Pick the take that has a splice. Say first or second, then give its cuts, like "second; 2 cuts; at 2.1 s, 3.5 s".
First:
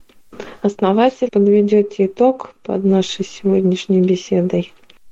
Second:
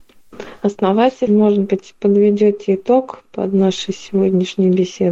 first; 1 cut; at 1.3 s